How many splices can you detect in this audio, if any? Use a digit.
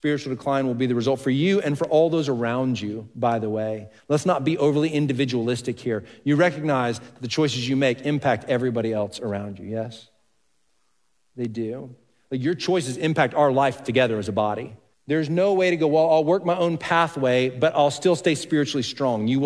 1